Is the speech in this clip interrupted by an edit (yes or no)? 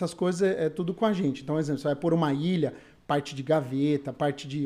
no